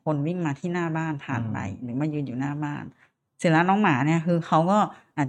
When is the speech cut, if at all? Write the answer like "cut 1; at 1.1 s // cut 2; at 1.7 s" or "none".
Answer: none